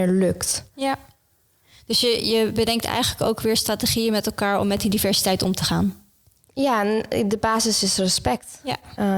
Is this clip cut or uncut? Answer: uncut